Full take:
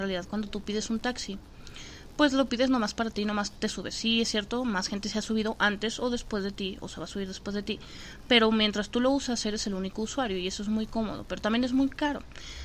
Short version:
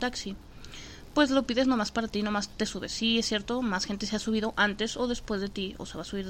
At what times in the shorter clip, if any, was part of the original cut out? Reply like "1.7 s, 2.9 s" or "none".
none